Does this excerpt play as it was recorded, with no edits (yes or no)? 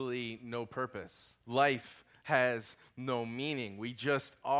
no